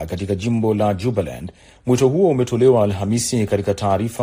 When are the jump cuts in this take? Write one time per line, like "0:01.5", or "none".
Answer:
0:01.7